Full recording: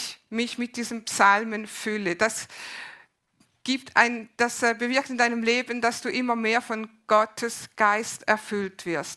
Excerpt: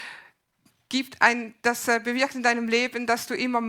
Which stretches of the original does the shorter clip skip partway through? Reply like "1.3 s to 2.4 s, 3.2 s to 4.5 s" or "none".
none